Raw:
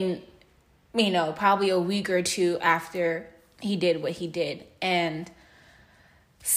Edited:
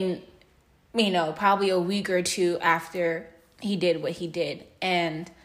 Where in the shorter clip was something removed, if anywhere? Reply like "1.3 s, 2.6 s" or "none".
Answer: none